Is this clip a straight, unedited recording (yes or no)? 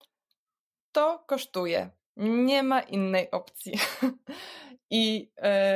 no